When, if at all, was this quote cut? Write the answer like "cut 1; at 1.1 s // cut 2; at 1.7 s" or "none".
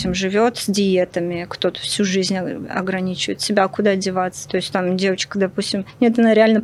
none